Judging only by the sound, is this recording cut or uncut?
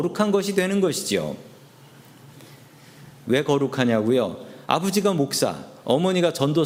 cut